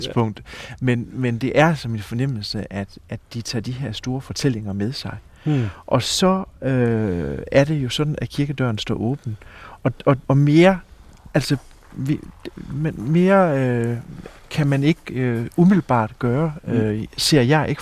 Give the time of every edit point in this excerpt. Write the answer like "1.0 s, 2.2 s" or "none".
10.2 s